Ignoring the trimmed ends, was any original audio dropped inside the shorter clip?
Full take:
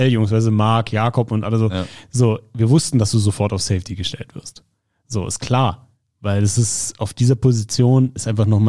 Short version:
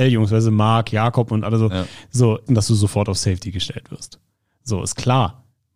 yes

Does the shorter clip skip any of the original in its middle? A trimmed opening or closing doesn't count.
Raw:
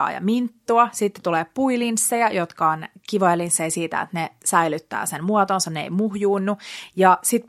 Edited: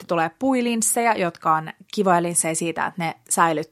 no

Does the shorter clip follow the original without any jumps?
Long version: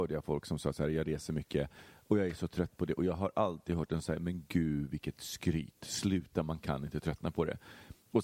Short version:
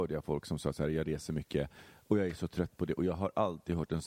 yes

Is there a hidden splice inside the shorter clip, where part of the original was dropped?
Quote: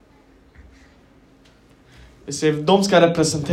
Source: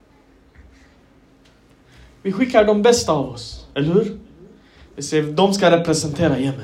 yes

